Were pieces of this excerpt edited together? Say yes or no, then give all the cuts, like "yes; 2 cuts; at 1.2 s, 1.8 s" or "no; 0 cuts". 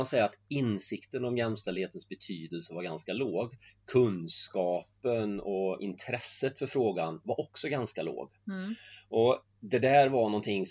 no; 0 cuts